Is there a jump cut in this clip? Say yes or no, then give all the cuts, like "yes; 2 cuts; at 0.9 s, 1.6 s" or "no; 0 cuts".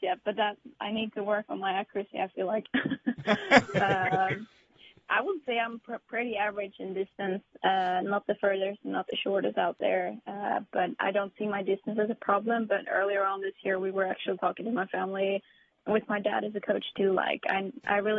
no; 0 cuts